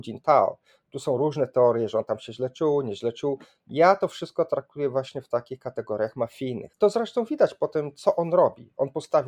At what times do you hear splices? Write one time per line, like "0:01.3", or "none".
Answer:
0:06.7